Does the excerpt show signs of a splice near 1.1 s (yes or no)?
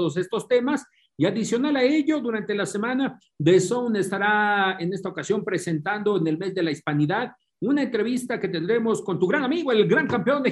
no